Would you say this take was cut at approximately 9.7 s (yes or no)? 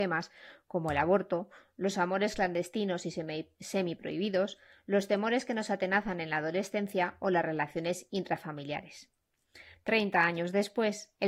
yes